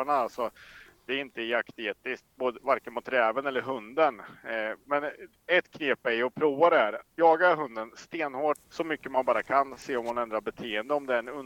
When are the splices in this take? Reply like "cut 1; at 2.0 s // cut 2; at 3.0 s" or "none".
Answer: cut 1; at 8.6 s